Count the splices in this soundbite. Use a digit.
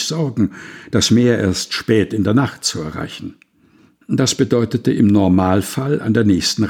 1